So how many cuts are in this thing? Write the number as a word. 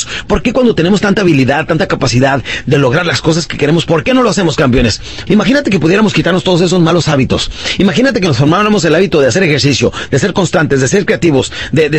one